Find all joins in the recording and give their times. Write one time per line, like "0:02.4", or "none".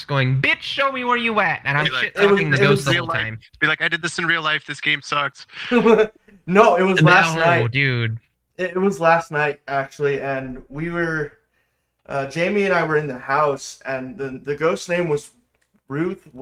0:03.5